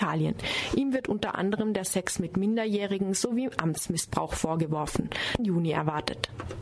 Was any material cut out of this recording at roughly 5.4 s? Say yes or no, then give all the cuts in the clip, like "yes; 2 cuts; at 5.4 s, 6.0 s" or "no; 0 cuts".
yes; 1 cut; at 5.4 s